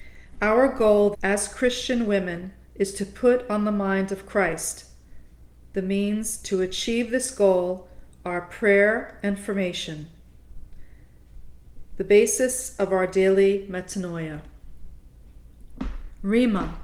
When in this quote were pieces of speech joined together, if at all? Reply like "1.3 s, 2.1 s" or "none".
1.1 s